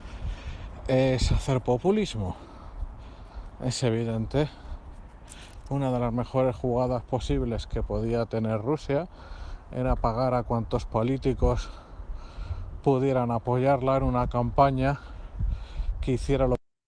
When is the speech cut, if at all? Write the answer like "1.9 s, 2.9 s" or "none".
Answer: none